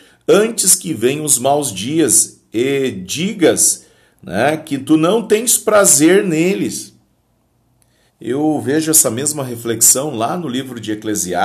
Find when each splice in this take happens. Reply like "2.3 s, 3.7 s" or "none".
8.1 s